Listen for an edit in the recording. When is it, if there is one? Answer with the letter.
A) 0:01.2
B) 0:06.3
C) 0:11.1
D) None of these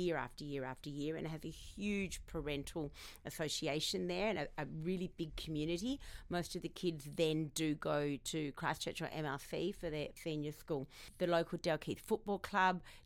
D